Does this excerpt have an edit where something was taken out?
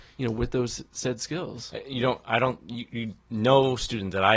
no; 0 cuts

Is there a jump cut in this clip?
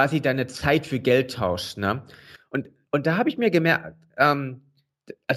yes; 1 cut; at 2.4 s

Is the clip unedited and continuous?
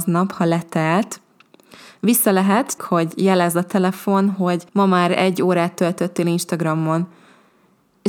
no; 2 cuts; at 2.8 s, 4.7 s

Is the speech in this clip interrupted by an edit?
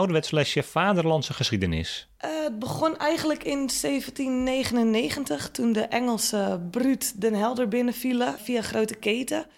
no; 0 cuts

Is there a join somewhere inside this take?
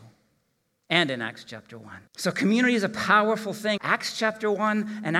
yes; 2 cuts; at 2.1 s, 3.8 s

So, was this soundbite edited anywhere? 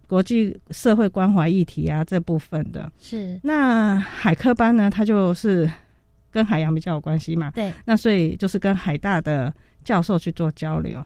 no; 0 cuts

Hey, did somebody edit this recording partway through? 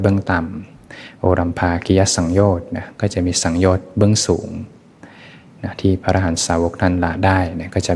no; 0 cuts

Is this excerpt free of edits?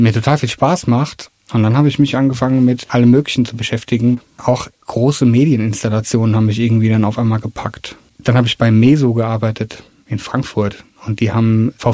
no; 1 cut; at 1.3 s

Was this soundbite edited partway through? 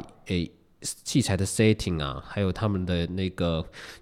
no; 0 cuts

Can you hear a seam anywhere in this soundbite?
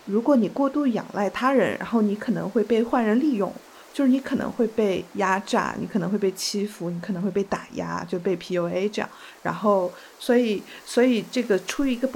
no; 0 cuts

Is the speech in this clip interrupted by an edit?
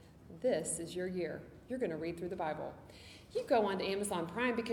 no; 0 cuts

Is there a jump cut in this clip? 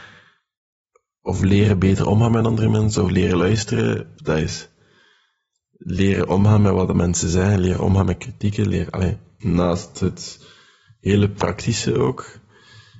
yes; 2 cuts; at 4.2 s, 9.4 s

